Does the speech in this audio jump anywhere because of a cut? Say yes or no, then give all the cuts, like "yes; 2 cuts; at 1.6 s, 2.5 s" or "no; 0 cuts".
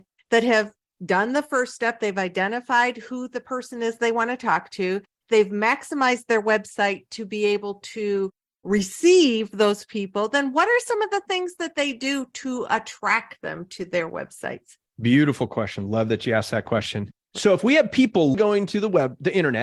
yes; 2 cuts; at 17.2 s, 18.3 s